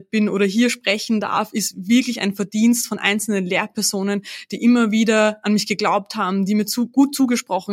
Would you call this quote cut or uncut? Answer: uncut